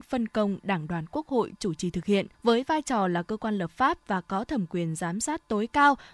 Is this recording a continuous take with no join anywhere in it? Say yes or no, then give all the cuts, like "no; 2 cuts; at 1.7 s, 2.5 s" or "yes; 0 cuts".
no; 1 cut; at 2.3 s